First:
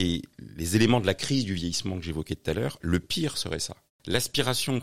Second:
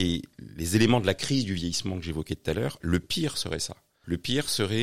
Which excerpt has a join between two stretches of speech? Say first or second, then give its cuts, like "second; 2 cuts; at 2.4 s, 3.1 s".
first; 1 cut; at 3.9 s